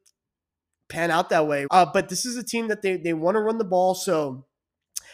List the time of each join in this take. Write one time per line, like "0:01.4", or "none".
0:01.7